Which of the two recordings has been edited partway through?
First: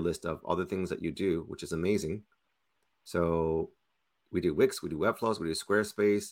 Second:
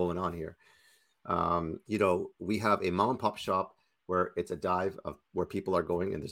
second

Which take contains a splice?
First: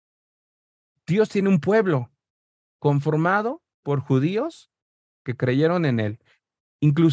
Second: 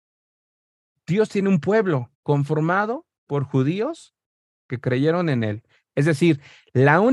second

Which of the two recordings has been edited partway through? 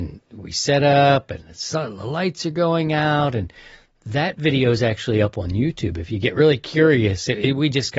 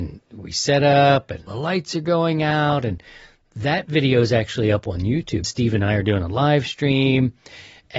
second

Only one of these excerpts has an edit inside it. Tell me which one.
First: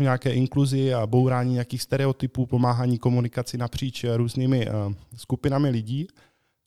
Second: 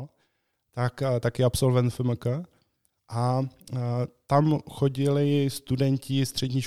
second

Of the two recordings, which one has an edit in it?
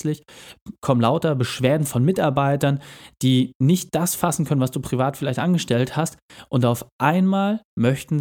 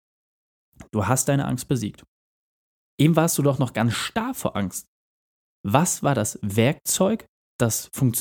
second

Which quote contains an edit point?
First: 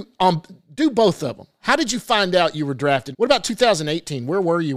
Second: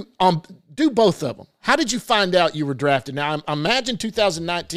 first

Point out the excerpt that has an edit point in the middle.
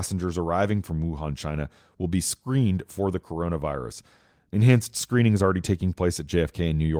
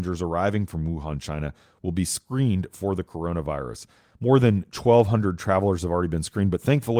second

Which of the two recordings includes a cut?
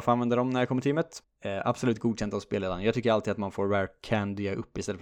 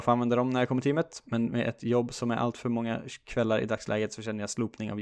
first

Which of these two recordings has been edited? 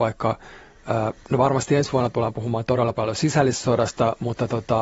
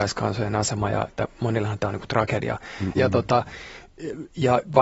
second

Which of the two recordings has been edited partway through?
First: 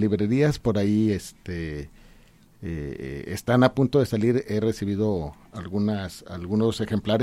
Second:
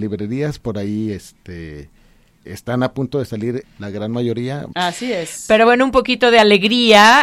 second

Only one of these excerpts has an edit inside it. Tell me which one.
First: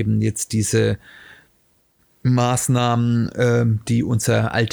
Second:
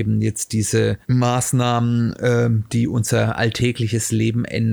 second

